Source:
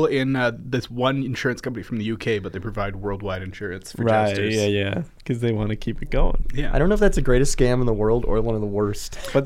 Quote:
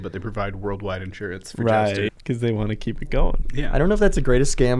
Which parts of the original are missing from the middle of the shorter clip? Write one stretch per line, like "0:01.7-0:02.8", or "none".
0:04.5-0:05.1